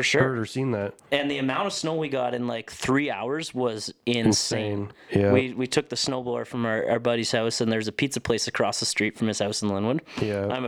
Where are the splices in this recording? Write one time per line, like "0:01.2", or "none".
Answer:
none